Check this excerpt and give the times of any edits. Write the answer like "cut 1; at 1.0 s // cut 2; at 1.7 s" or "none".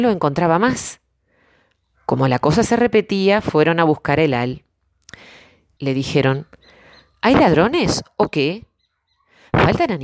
cut 1; at 5.8 s